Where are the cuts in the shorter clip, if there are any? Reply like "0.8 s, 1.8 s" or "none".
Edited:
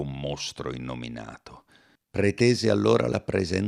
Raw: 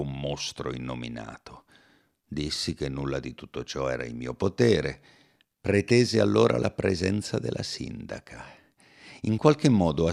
2.0 s